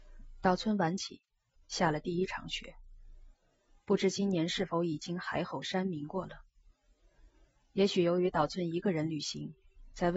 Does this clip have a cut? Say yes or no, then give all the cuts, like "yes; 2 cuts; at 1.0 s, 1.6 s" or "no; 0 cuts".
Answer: yes; 1 cut; at 1.5 s